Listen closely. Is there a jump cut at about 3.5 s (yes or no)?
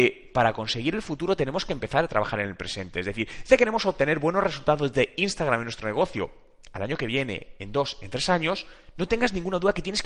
yes